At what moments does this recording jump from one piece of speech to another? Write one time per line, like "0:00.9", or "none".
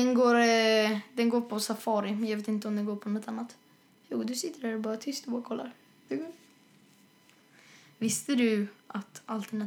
0:06.1